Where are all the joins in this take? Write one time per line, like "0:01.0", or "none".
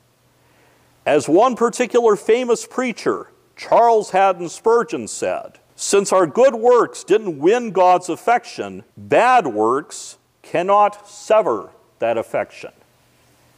0:05.7
0:08.9